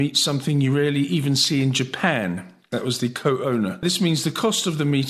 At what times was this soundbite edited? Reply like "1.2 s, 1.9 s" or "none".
none